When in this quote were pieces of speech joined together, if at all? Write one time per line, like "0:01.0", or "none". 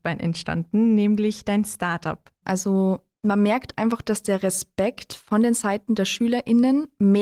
0:02.4